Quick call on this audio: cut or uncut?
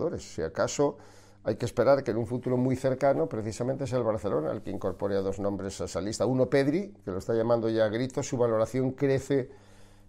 uncut